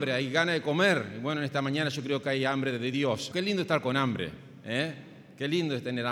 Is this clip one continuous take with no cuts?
no; 1 cut; at 3.3 s

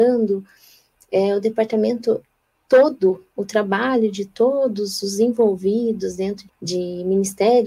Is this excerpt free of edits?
no; 2 cuts; at 3.4 s, 6.5 s

